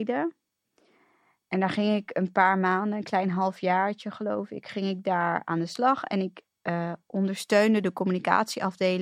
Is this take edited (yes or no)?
no